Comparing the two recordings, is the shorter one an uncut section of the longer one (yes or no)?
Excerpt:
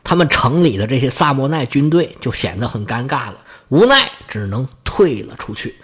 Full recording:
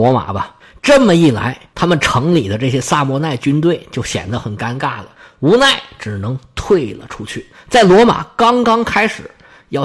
yes